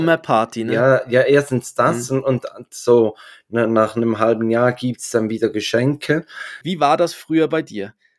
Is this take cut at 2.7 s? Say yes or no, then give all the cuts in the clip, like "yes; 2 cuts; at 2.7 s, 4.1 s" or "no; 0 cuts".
no; 1 cut; at 6.6 s